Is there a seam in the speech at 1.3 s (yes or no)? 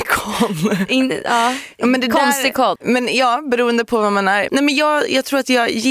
no